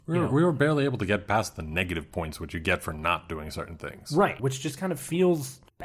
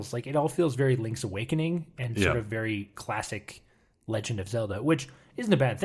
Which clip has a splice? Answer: first; 1 cut; at 4.4 s

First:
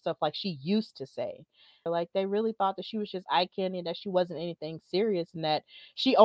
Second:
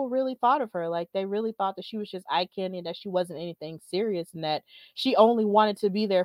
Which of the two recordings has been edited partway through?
first; 1 cut; at 1.9 s

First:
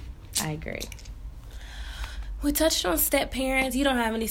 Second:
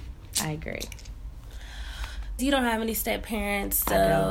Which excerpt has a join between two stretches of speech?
second; 1 cut; at 2.4 s

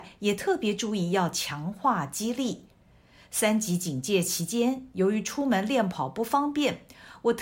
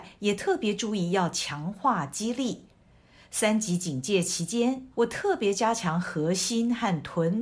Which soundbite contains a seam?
second; 1 cut; at 4.9 s

